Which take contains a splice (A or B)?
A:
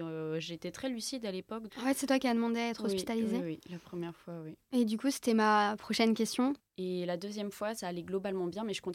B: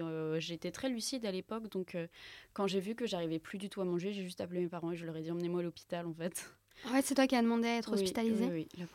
A